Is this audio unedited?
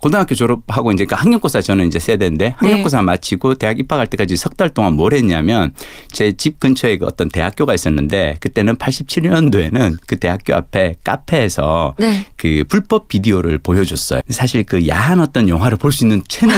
no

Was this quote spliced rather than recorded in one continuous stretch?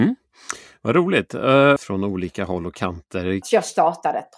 yes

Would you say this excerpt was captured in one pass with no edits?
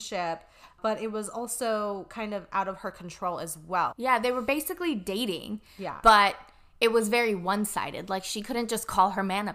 no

